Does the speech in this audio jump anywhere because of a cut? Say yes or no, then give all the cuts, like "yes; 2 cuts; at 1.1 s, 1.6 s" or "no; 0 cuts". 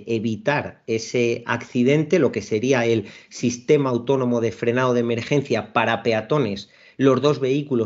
no; 0 cuts